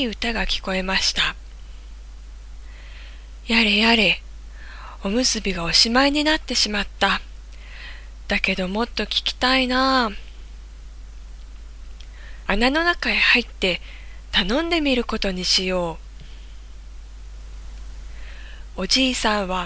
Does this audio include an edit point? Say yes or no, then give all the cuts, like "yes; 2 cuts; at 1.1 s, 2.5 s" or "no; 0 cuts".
yes; 1 cut; at 12.5 s